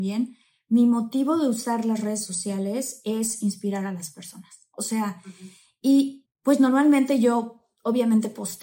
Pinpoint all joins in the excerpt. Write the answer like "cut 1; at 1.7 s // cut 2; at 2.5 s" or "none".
cut 1; at 4.7 s // cut 2; at 6.2 s